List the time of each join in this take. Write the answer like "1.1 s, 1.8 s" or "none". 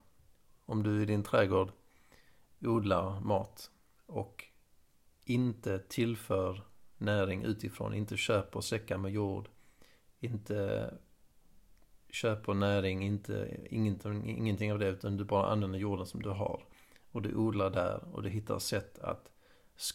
none